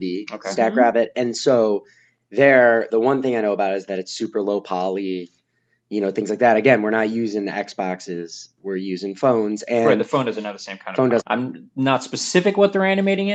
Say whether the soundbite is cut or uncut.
cut